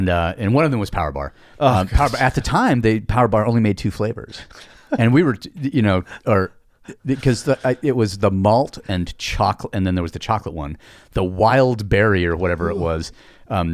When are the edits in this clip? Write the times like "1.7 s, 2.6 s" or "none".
8.8 s